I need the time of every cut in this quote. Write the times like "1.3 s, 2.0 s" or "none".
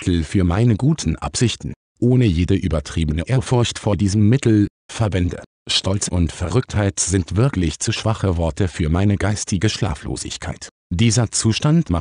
none